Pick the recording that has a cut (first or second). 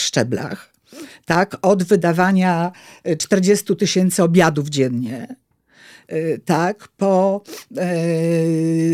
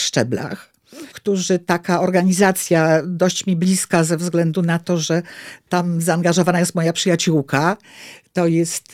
second